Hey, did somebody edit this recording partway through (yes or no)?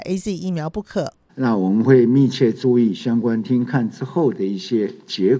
yes